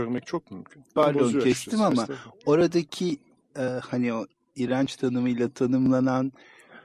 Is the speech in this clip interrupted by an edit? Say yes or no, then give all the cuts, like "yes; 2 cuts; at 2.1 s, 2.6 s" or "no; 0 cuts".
yes; 1 cut; at 1.0 s